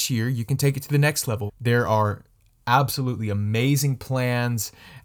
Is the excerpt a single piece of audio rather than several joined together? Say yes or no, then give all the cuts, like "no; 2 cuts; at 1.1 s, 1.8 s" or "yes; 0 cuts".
no; 1 cut; at 1.5 s